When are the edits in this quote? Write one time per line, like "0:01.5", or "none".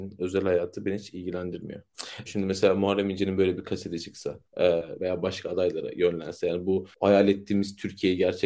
0:02.3
0:05.0